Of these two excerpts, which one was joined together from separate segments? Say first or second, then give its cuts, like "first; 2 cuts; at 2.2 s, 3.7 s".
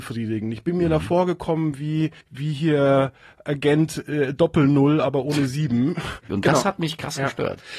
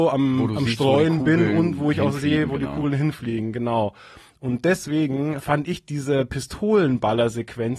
first; 2 cuts; at 2.2 s, 6.3 s